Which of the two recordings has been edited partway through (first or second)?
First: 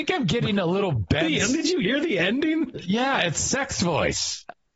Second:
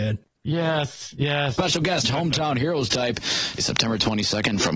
second